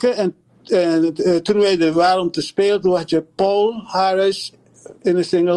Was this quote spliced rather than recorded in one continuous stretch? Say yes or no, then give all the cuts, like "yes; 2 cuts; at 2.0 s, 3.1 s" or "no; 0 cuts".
no; 0 cuts